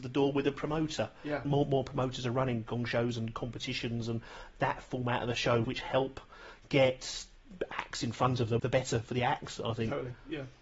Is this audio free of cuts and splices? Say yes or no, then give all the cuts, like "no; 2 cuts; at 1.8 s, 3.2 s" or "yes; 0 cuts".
no; 3 cuts; at 1.4 s, 5.6 s, 8.6 s